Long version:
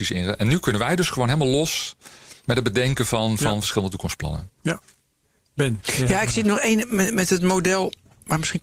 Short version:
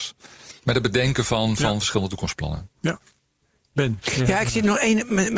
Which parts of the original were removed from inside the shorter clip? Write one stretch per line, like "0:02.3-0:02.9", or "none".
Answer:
none